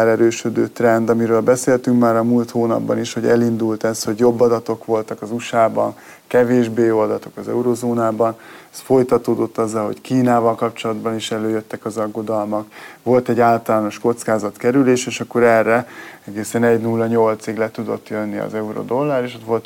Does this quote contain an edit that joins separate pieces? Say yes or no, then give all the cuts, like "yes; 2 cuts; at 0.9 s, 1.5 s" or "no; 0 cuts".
no; 0 cuts